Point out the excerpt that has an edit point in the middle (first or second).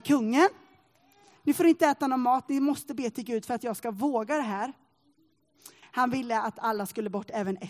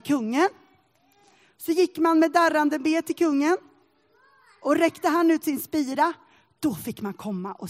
first